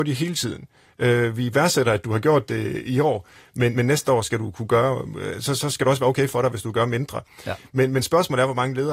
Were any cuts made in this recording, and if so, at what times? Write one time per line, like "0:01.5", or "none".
none

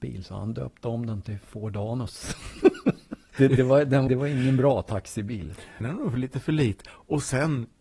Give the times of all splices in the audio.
0:04.1
0:05.8

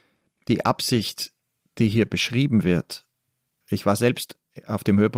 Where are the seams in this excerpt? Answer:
0:03.6

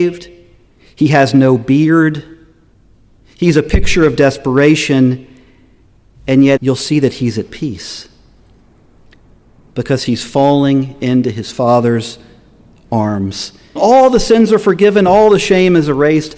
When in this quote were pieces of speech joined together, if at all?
0:06.6
0:13.8

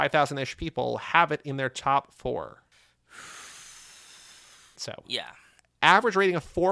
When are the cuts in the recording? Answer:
0:04.8

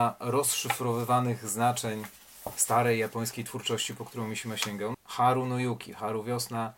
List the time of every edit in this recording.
0:04.9

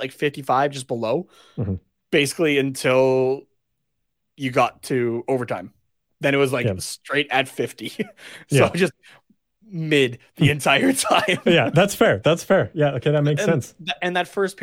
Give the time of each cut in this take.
none

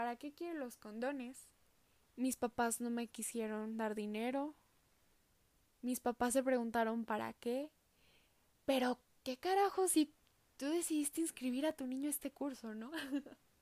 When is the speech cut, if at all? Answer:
0:02.1

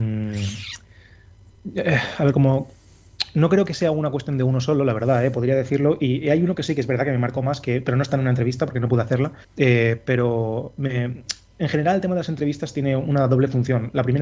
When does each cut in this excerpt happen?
0:09.4

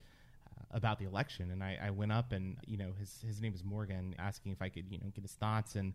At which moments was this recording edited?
0:02.6
0:04.2

